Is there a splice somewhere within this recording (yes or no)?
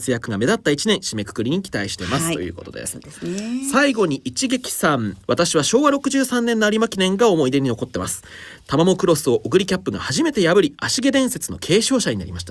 no